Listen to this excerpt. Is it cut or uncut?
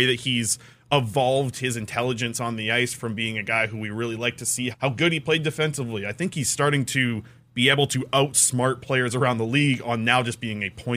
cut